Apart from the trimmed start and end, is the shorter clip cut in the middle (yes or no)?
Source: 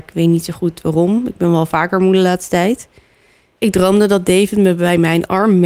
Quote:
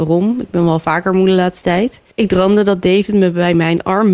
yes